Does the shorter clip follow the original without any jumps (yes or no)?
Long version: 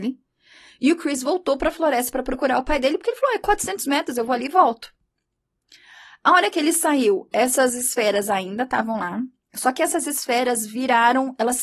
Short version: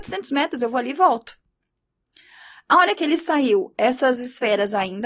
yes